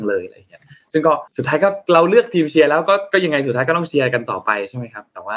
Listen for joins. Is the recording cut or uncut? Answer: cut